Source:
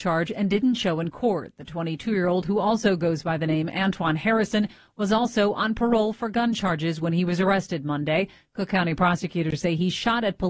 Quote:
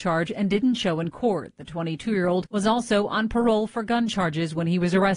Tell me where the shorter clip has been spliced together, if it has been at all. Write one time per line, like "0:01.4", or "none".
0:02.4